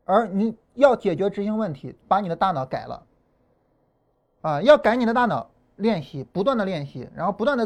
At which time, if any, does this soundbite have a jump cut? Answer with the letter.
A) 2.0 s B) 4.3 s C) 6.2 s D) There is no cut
A